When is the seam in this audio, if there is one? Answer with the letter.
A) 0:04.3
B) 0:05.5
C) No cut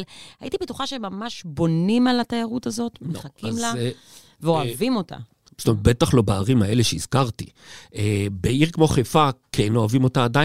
B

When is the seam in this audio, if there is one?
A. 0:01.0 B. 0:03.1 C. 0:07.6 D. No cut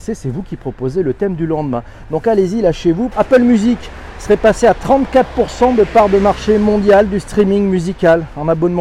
B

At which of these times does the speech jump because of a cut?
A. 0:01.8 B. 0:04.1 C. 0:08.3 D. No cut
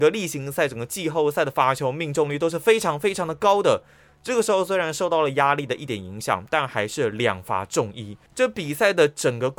C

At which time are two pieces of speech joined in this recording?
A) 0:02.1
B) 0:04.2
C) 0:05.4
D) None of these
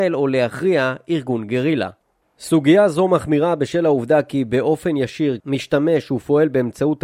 C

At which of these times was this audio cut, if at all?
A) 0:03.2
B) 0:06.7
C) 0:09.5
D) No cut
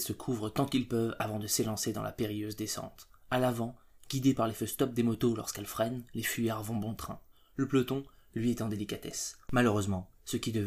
C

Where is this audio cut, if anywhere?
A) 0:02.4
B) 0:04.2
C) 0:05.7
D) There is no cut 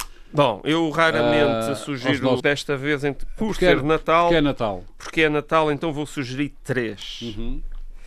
A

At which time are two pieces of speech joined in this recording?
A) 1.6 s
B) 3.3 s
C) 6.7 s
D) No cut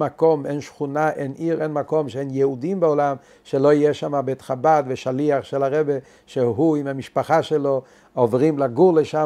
D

